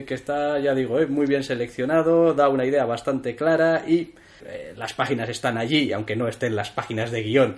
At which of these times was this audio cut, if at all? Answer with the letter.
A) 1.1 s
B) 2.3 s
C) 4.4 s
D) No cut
C